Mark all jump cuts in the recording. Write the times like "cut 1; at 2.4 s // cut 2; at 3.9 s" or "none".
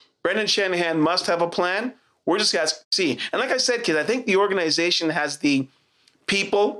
cut 1; at 2.8 s